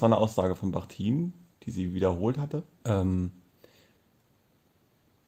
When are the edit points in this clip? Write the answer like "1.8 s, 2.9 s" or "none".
2.8 s

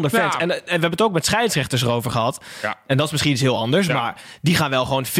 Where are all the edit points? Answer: none

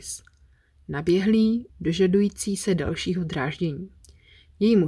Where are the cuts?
1.7 s

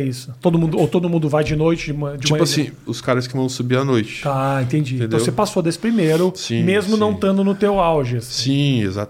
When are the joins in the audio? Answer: 2.8 s

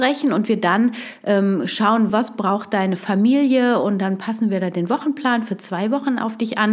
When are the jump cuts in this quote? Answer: 2.1 s

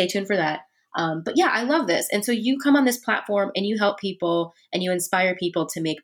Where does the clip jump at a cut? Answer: none

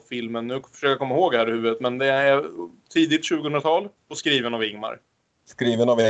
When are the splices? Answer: 4.0 s

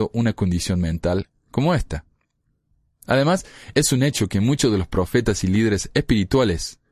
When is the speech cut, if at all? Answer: none

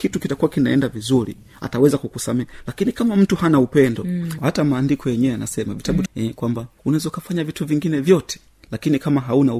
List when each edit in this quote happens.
4.4 s, 6.1 s

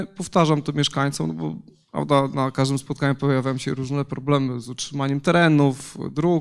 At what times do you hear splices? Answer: none

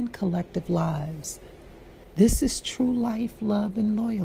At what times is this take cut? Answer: none

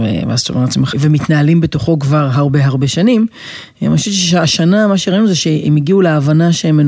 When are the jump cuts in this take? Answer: 0.9 s

